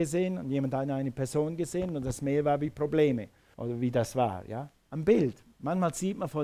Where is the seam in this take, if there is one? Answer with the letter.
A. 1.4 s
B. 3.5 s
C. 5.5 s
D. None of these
B